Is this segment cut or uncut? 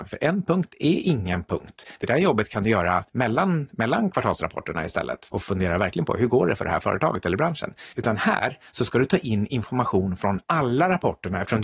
uncut